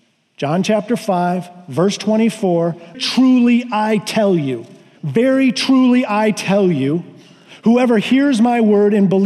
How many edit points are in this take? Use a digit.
2